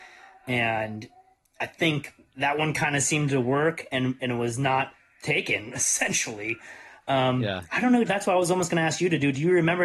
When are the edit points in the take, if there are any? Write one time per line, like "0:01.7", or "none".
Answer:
0:08.0

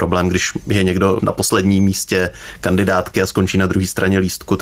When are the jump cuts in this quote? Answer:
none

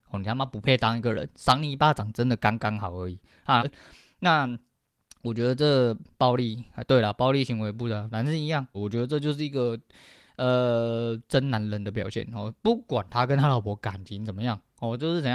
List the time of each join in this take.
0:03.6
0:08.7

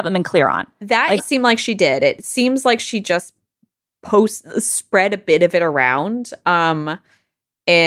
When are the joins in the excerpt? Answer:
0:01.2

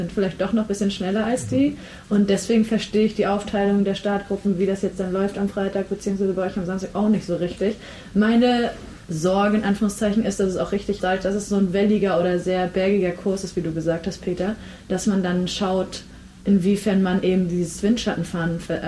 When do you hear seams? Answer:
0:09.0
0:11.0

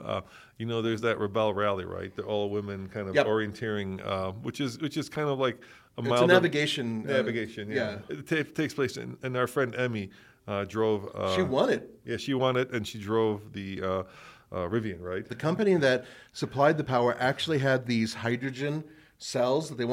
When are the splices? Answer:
0:15.3

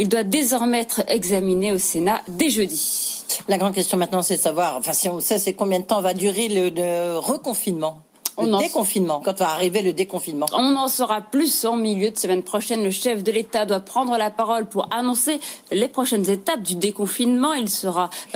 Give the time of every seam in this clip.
0:09.2

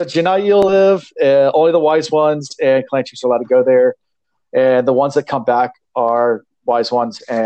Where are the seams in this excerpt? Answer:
none

